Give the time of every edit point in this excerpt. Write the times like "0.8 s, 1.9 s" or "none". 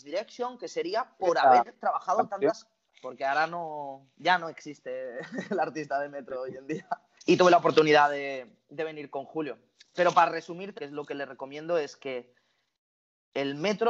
2.9 s, 7.2 s, 10.8 s